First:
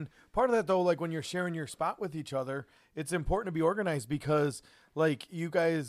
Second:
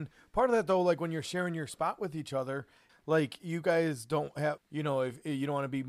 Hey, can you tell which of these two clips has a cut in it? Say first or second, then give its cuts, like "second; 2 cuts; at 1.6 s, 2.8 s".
second; 2 cuts; at 2.9 s, 4.6 s